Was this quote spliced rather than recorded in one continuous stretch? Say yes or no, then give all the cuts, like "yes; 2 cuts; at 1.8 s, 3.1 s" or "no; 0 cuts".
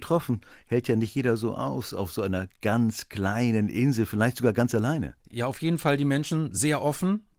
yes; 1 cut; at 5.2 s